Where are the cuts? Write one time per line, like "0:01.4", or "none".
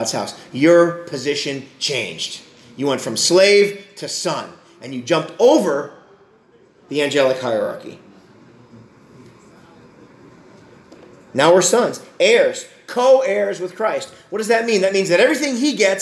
none